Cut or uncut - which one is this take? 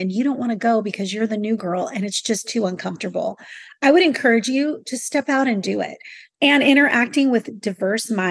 cut